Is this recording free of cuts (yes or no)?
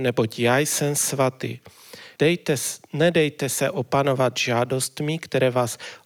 no